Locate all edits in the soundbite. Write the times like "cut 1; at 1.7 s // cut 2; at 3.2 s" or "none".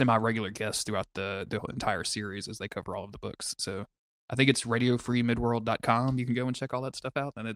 none

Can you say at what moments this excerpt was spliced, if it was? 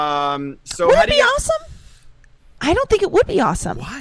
cut 1; at 2.6 s

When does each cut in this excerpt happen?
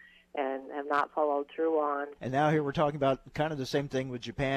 cut 1; at 2.2 s

